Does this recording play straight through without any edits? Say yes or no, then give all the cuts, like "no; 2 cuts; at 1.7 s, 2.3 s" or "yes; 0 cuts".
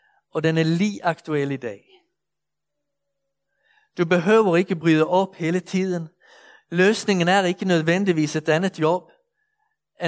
yes; 0 cuts